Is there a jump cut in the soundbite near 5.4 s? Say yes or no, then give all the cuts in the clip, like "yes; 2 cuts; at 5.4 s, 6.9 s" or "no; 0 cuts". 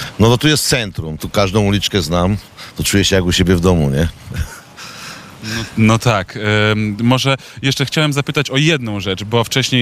no; 1 cut; at 1.2 s